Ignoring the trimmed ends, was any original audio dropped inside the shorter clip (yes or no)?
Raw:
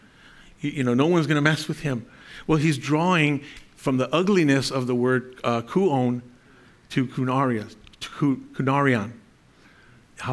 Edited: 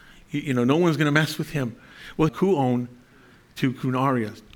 yes